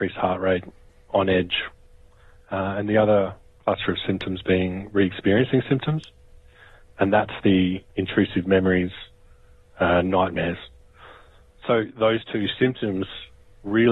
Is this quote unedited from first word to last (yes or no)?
yes